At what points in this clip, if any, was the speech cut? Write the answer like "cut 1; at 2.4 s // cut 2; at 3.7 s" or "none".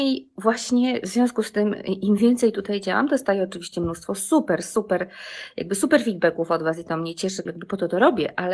cut 1; at 7.5 s

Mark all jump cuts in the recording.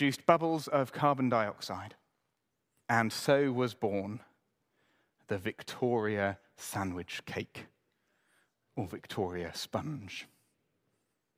cut 1; at 2.8 s

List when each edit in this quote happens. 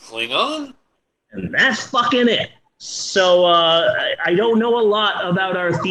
cut 1; at 0.9 s

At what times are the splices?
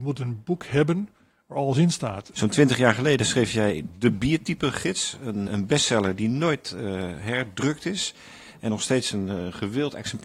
cut 1; at 2.3 s // cut 2; at 5.5 s

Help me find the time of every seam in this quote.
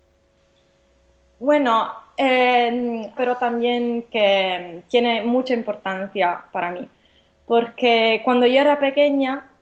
cut 1; at 3.2 s

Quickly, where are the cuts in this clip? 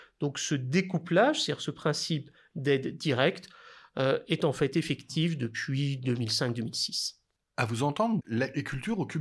cut 1; at 8.2 s

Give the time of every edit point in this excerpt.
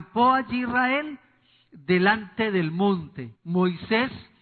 cut 1; at 3.4 s

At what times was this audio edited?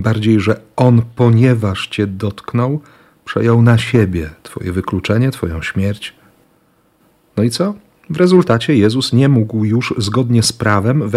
none

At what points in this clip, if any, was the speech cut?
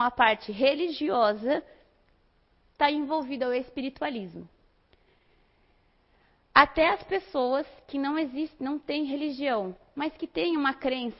none

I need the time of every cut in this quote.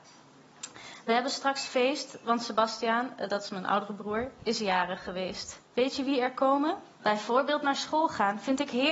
cut 1; at 5.7 s // cut 2; at 7.0 s

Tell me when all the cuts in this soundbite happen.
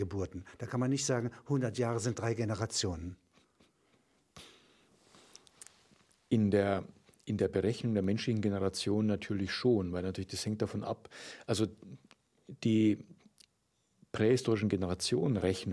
none

